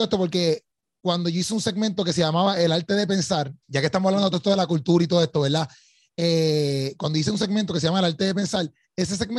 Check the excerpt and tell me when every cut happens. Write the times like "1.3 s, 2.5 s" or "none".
3.6 s